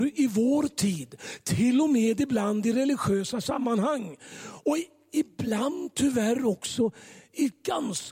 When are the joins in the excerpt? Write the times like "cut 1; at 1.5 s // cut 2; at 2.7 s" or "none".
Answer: none